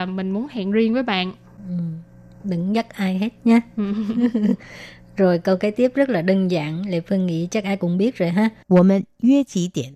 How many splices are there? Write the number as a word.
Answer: one